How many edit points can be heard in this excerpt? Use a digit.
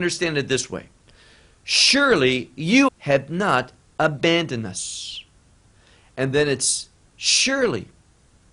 1